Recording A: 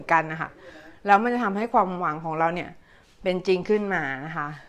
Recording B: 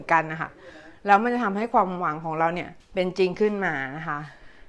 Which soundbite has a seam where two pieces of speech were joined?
B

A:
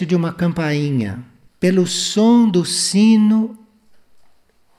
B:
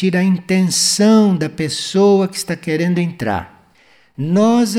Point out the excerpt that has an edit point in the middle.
A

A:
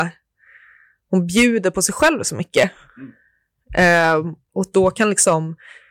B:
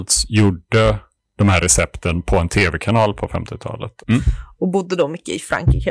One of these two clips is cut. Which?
B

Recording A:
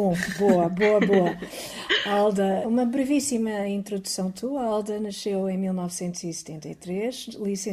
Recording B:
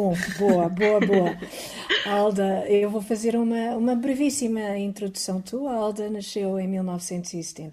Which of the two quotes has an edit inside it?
A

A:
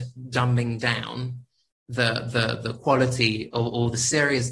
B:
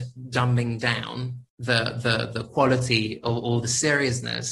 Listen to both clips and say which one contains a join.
B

